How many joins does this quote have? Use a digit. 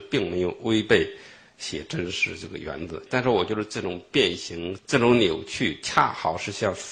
2